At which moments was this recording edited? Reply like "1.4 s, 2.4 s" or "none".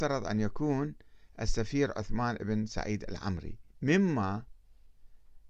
3.7 s